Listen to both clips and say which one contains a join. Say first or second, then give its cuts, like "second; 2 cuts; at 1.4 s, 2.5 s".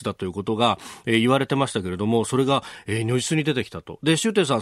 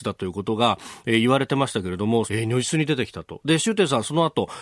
second; 1 cut; at 2.3 s